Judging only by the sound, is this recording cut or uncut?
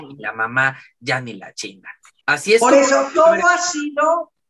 cut